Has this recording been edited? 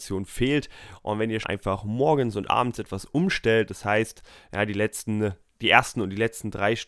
yes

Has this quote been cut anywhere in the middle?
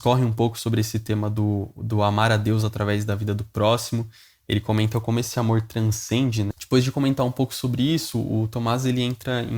yes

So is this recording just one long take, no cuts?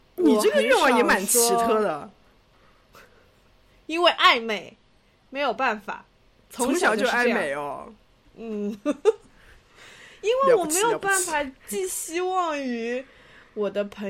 yes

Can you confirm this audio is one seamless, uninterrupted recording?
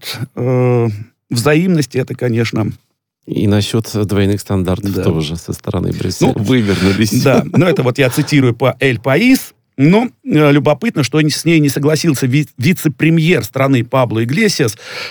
no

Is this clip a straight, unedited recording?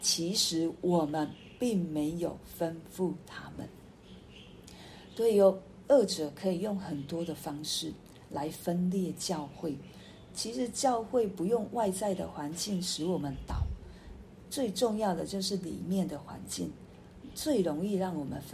yes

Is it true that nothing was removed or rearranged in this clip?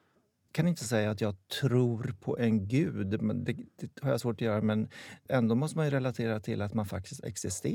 no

